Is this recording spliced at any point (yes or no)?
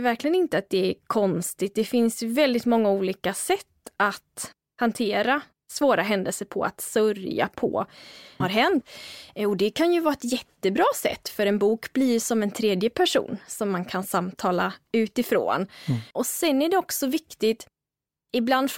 yes